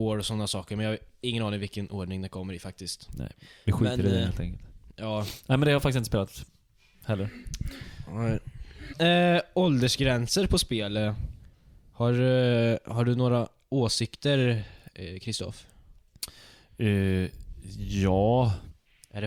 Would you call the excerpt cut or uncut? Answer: uncut